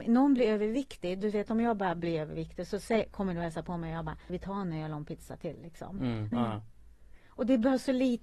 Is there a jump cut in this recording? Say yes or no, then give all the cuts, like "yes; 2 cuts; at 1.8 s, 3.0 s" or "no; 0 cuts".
yes; 2 cuts; at 4.3 s, 6.3 s